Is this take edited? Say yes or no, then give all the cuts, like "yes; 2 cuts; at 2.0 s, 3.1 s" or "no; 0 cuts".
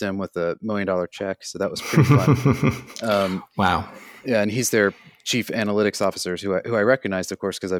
no; 0 cuts